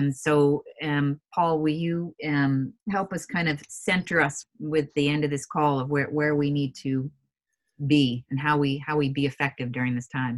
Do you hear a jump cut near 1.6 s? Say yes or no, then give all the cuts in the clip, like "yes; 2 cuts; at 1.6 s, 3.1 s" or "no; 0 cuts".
no; 2 cuts; at 2.8 s, 4.4 s